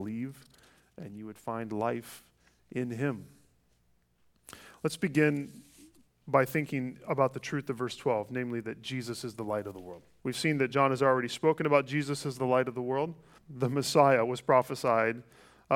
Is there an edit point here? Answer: yes; 2 cuts; at 10.2 s, 13.4 s

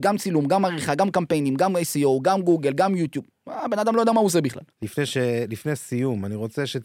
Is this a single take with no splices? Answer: no; 1 cut; at 4.7 s

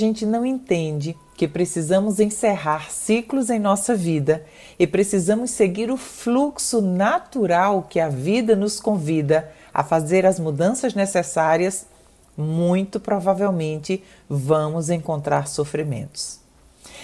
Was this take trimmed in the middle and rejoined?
no; 0 cuts

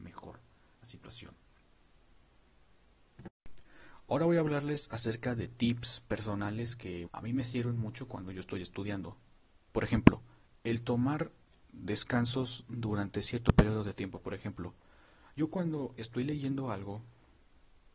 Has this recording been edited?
yes; 1 cut; at 7.1 s

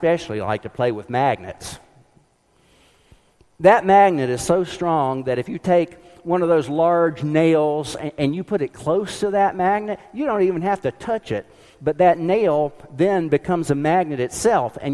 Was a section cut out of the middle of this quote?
no; 0 cuts

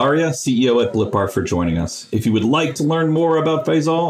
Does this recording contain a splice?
no; 0 cuts

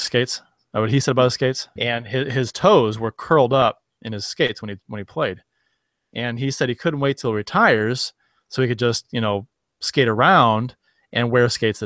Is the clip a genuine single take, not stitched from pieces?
no; 1 cut; at 1.8 s

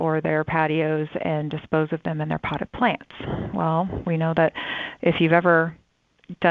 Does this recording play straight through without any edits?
yes; 0 cuts

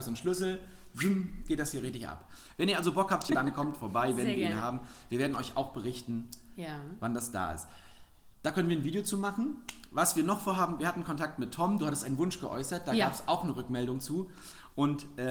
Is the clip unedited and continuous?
no; 1 cut; at 3.3 s

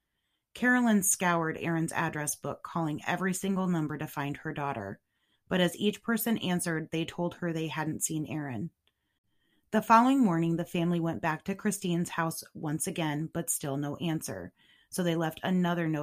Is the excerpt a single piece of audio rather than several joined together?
yes; 0 cuts

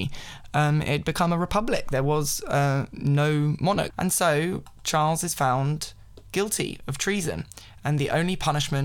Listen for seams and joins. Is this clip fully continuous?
no; 1 cut; at 3.9 s

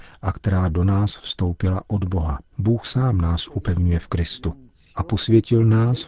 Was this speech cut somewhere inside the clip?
yes; 1 cut; at 2.5 s

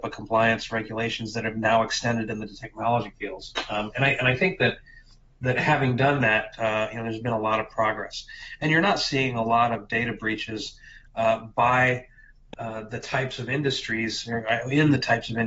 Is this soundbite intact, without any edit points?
yes; 0 cuts

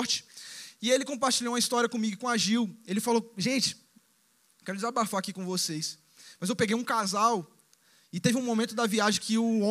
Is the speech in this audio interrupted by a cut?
no; 0 cuts

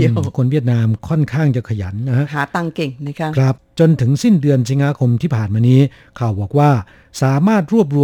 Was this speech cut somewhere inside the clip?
no; 0 cuts

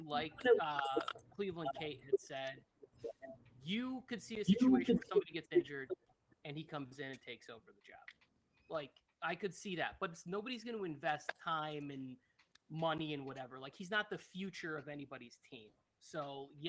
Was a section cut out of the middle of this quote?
no; 0 cuts

